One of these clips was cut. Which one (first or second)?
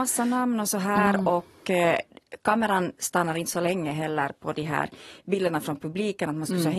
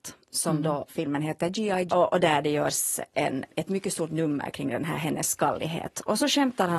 second